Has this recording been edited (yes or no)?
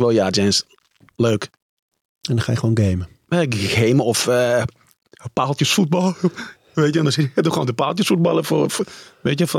no